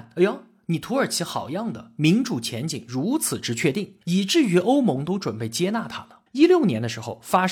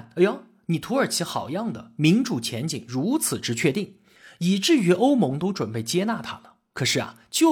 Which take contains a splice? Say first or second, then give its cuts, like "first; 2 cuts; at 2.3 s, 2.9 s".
first; 2 cuts; at 4.0 s, 6.3 s